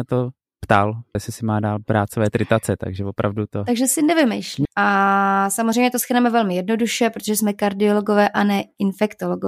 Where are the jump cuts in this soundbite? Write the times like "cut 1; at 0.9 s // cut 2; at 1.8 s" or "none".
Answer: cut 1; at 1.1 s // cut 2; at 4.6 s